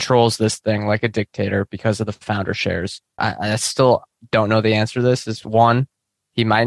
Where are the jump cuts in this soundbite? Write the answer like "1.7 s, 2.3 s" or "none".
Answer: 3.2 s